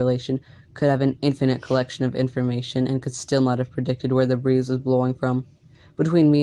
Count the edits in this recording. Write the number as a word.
zero